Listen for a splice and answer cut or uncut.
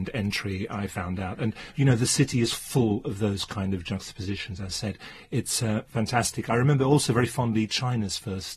uncut